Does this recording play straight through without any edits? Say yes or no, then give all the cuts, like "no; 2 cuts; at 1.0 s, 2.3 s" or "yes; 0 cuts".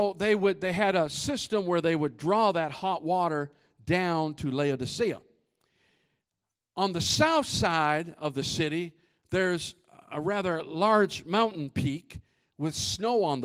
yes; 0 cuts